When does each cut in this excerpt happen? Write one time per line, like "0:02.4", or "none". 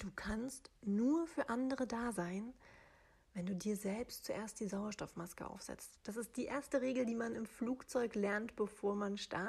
none

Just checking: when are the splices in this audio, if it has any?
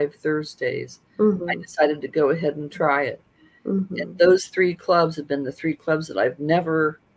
none

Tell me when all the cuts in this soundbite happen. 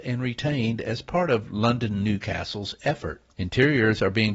0:03.3

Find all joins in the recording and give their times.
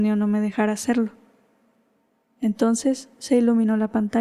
none

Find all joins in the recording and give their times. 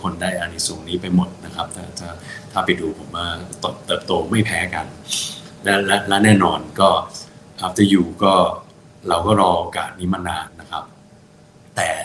0:10.5

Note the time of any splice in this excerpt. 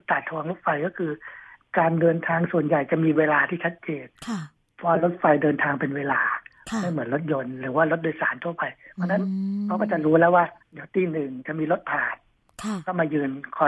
0:04.2
0:10.6

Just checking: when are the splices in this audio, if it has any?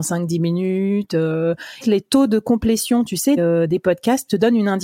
0:01.8
0:03.4

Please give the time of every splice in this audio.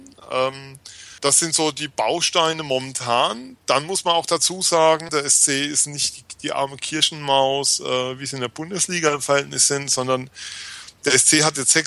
0:01.2
0:05.1

